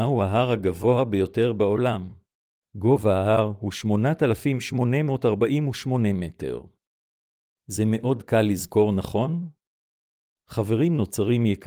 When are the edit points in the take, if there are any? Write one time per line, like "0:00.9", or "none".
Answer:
0:02.5